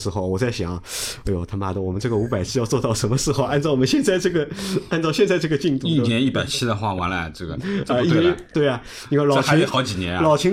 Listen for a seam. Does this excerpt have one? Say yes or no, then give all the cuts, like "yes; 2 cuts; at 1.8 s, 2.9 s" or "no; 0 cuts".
no; 0 cuts